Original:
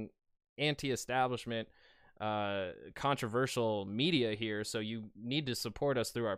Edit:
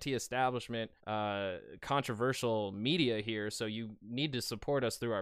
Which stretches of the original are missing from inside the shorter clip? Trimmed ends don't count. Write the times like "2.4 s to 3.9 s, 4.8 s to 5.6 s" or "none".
1.7 s to 2.1 s